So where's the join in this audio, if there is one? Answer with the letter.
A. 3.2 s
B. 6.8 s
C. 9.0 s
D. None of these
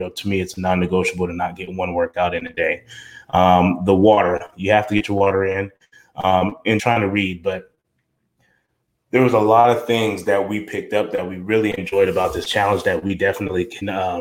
B